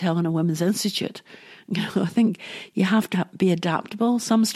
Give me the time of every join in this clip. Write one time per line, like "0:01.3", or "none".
0:02.0
0:03.1